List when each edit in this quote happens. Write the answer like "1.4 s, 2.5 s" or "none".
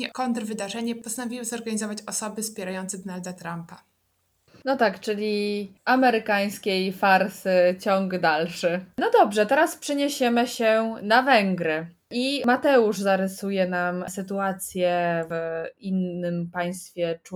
none